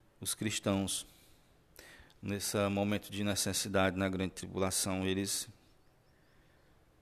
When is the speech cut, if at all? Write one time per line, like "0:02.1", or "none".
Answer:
none